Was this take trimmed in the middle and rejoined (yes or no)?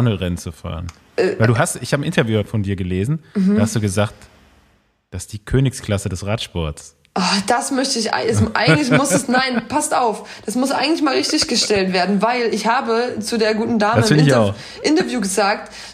no